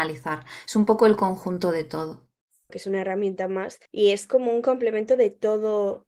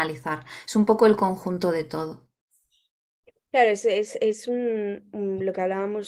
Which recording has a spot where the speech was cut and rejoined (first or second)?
first